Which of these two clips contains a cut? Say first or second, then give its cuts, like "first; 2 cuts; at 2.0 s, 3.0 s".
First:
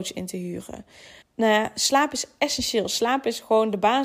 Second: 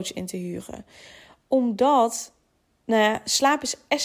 first; 1 cut; at 1.2 s